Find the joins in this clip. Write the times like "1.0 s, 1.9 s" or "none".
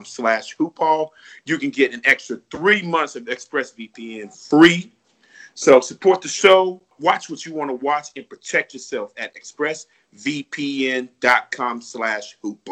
6.9 s